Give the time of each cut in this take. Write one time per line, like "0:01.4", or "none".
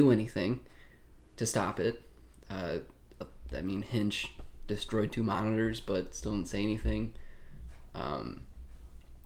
none